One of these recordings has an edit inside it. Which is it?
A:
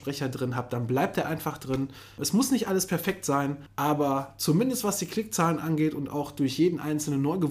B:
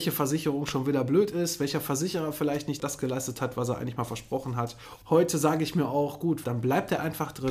B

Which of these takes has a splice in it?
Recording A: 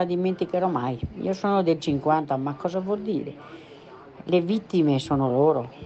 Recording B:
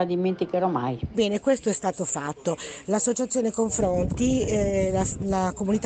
B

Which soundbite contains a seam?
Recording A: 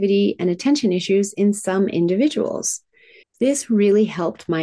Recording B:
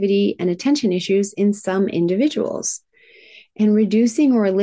A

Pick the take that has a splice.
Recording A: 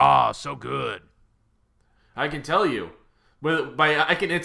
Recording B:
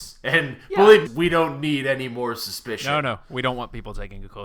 B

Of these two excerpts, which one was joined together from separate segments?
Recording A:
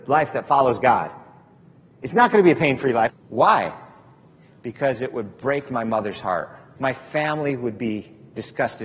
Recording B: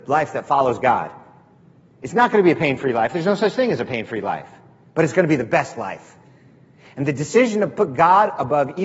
A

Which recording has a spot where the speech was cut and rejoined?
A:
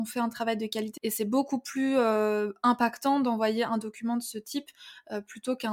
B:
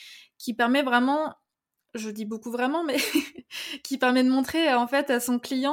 A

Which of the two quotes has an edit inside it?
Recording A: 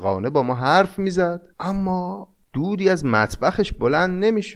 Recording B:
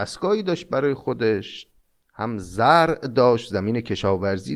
A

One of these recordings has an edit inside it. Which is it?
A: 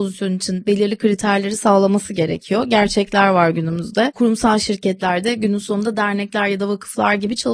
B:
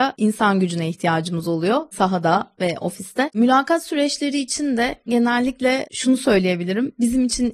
B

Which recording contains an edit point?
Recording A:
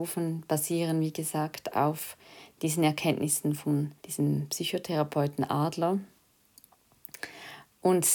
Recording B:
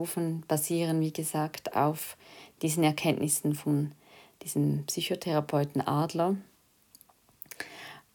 A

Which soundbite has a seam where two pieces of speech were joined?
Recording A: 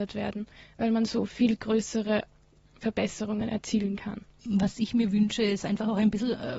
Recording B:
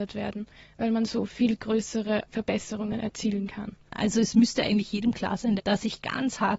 B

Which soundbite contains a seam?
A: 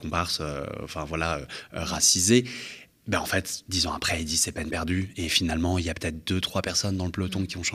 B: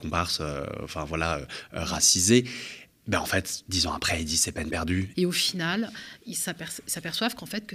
B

